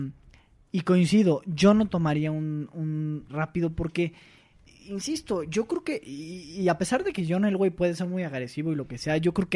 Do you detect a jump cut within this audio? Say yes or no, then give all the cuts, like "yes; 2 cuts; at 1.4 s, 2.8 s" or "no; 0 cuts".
yes; 1 cut; at 3.3 s